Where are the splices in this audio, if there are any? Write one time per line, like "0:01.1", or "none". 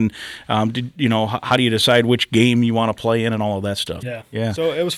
0:04.0